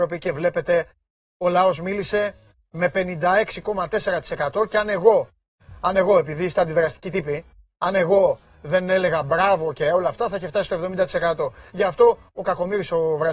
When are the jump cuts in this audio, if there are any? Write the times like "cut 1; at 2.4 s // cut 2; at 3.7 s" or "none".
cut 1; at 11.7 s